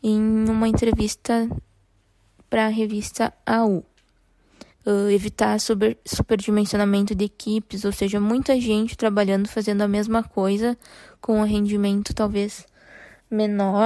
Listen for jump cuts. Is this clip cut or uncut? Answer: cut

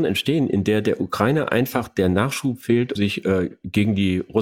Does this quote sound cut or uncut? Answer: cut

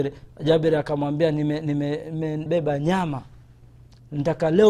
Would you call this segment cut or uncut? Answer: cut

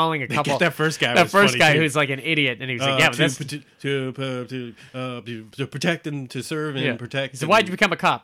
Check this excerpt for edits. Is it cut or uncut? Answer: uncut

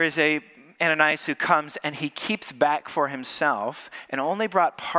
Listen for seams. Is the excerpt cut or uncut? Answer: uncut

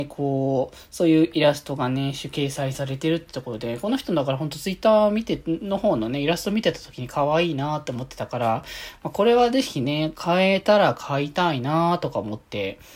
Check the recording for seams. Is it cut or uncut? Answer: uncut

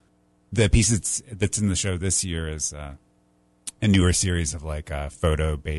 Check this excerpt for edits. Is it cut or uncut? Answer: uncut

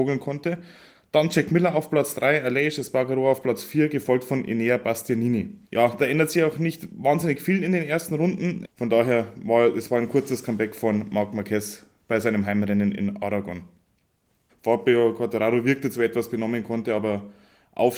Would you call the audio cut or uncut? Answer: cut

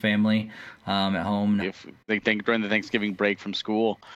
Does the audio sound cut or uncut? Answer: cut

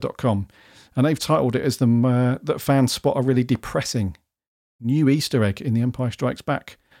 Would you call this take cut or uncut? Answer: uncut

